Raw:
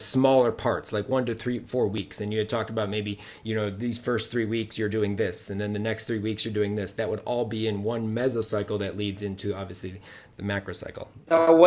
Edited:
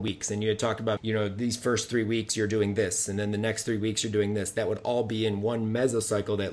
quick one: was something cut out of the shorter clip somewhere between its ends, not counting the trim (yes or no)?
yes